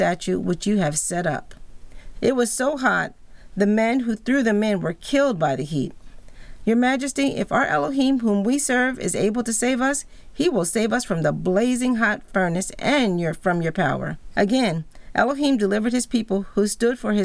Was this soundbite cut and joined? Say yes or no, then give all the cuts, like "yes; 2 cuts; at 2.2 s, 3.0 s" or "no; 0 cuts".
yes; 3 cuts; at 2.1 s, 6.6 s, 14.3 s